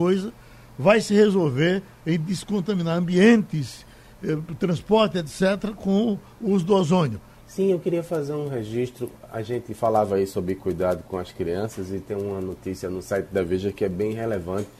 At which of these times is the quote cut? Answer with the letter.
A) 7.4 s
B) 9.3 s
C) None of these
A